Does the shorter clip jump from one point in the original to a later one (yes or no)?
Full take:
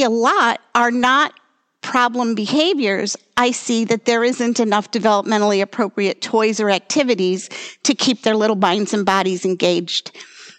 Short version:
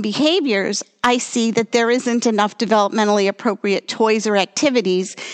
no